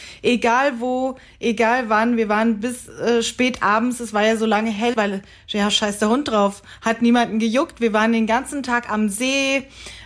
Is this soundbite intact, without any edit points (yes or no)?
no